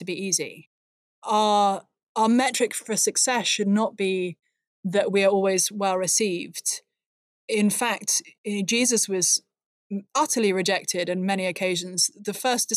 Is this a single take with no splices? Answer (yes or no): no